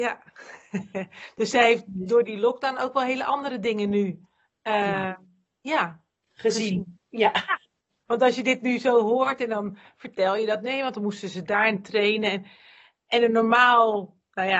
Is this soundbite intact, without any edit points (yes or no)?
no